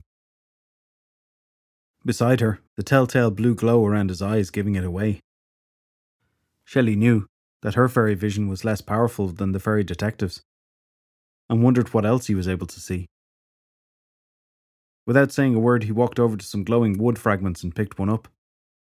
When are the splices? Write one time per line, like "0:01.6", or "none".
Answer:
0:02.7